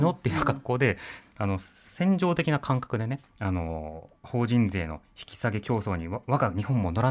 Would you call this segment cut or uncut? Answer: cut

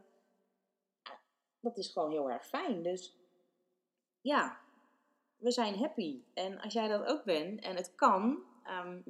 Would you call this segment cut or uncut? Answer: uncut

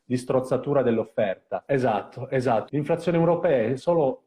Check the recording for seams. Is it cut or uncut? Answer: cut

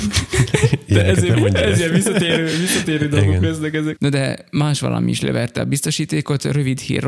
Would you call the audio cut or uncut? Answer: cut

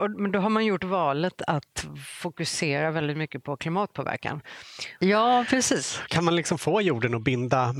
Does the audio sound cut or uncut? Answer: cut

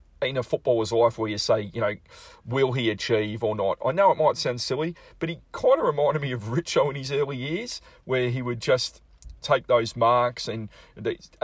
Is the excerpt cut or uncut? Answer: cut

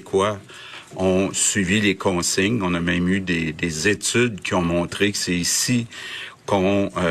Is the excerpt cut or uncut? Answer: uncut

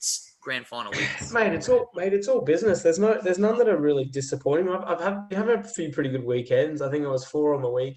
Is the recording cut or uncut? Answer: uncut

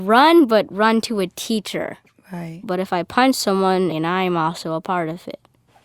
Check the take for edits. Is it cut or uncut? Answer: cut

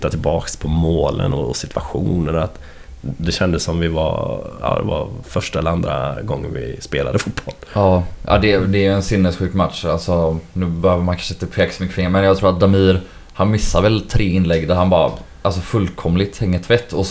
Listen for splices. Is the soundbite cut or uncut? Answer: uncut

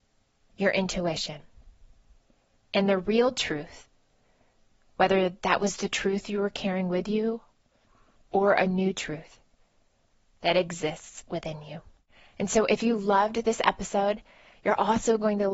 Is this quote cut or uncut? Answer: uncut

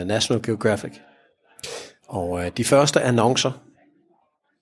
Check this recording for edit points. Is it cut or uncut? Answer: uncut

